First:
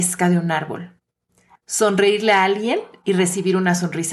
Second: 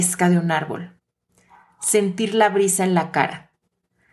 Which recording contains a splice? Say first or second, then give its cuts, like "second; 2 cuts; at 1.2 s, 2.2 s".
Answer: first; 1 cut; at 1.5 s